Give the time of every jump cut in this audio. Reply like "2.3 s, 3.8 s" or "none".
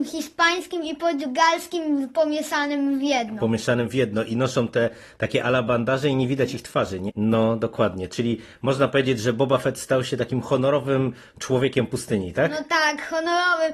7.1 s